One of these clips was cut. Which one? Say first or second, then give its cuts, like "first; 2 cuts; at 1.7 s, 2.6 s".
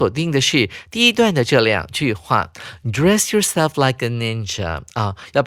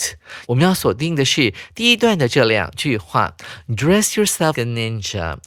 second; 1 cut; at 4.6 s